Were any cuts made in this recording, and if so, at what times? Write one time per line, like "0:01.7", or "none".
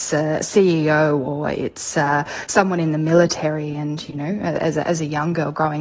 none